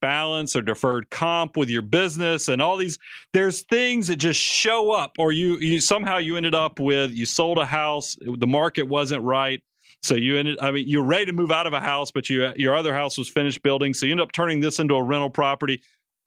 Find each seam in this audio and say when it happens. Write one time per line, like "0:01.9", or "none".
none